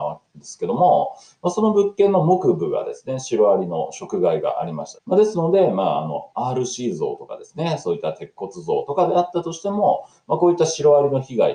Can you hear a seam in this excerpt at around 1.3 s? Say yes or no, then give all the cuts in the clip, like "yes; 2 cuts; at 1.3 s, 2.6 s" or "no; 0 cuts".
no; 1 cut; at 5.0 s